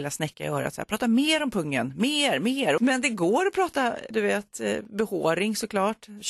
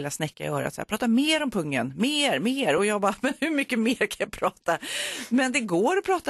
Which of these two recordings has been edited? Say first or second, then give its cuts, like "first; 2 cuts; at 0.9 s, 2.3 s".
first; 1 cut; at 2.8 s